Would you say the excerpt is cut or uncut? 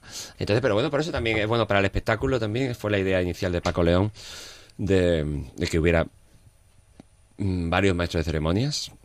uncut